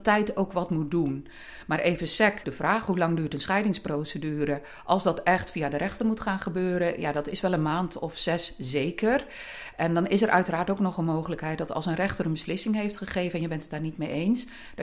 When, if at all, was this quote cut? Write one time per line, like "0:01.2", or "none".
0:02.4